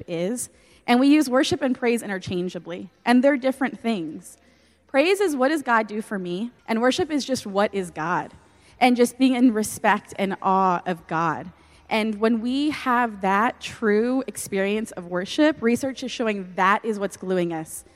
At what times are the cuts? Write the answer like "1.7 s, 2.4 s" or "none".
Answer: 6.6 s